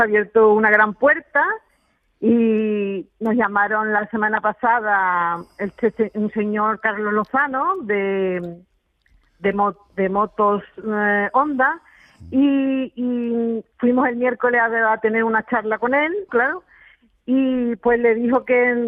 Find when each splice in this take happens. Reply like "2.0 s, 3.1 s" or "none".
16.3 s